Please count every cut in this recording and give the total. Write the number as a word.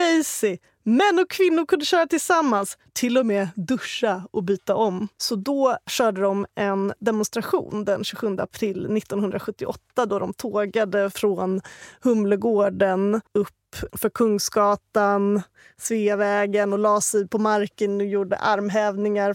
one